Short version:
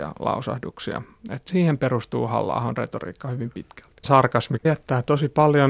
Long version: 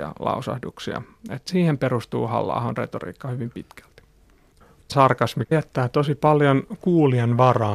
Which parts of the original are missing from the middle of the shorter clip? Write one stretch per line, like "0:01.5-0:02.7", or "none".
0:04.0-0:04.8